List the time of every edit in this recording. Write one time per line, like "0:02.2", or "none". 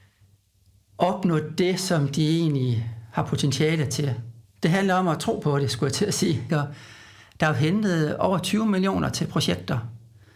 0:04.4
0:06.5